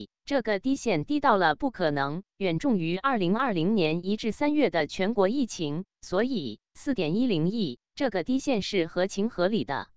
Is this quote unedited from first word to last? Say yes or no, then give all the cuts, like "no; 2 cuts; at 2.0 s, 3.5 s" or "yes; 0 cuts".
no; 1 cut; at 2.3 s